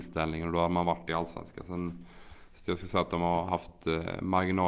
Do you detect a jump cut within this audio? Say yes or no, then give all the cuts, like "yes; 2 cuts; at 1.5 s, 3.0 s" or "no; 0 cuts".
no; 0 cuts